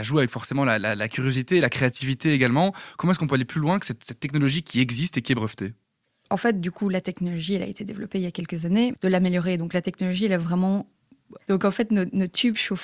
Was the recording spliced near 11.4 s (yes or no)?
yes